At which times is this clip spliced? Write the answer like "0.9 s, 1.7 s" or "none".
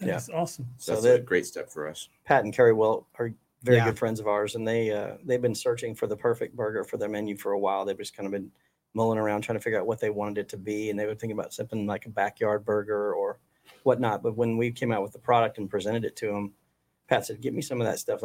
none